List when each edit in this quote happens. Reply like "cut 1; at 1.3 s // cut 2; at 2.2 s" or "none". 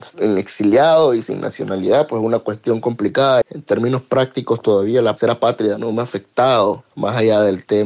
cut 1; at 3.4 s